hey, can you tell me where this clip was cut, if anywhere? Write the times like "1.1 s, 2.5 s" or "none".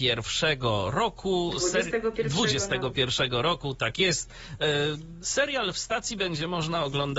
5.2 s

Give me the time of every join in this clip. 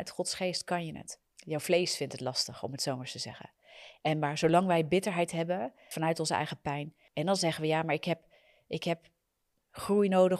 1.2 s, 4.0 s

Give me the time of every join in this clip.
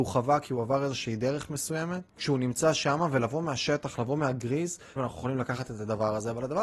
2.1 s, 5.0 s

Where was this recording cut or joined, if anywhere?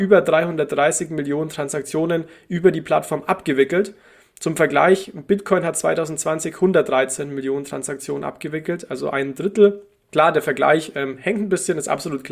none

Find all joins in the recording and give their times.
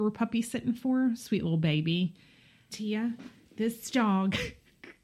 2.7 s

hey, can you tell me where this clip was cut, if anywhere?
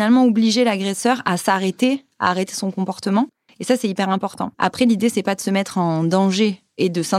4.5 s

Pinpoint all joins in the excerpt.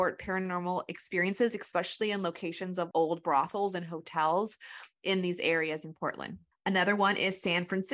2.9 s

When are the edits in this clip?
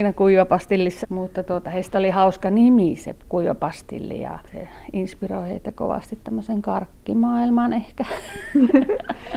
1.0 s

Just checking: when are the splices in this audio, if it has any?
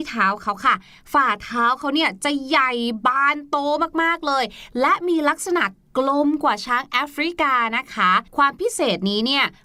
8.3 s

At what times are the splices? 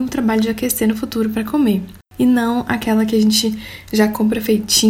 2.0 s

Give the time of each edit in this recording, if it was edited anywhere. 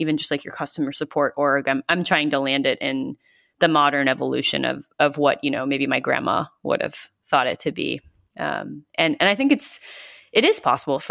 none

